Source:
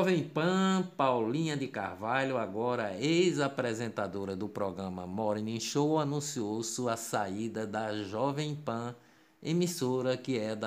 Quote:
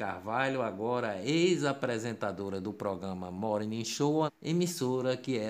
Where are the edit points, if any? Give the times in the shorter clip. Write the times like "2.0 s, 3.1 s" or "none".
4.3 s